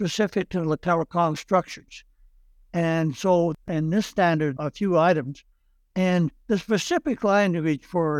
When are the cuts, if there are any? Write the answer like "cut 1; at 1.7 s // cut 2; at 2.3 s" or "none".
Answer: cut 1; at 4.6 s